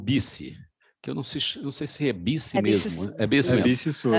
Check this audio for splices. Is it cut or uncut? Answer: uncut